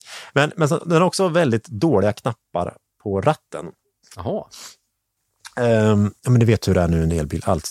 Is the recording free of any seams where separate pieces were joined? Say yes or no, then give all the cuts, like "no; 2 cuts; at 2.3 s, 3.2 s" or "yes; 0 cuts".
no; 1 cut; at 6.2 s